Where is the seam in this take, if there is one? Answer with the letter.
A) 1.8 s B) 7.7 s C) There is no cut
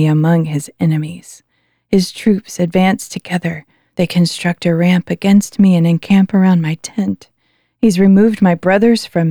C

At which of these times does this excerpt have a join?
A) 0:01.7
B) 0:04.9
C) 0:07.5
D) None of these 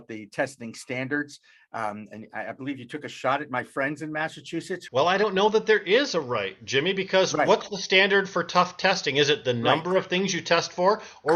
B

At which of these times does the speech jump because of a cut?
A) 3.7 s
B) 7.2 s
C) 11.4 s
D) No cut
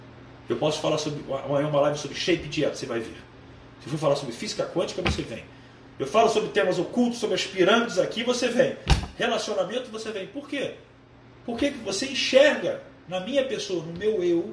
A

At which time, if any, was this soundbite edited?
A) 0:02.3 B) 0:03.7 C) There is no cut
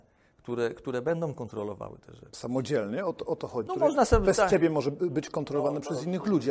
B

